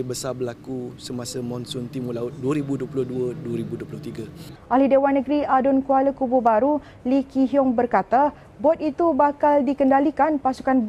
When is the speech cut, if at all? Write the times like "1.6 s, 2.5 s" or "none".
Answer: 4.5 s